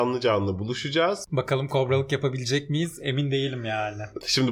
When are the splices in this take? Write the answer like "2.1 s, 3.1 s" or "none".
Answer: 1.2 s